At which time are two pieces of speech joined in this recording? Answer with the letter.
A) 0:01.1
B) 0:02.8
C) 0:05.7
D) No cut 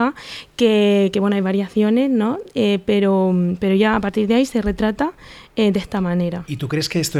D